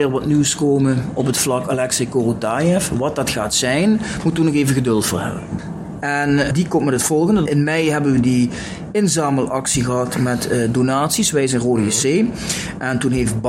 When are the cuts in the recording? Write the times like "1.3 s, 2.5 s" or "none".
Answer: 6.0 s, 7.5 s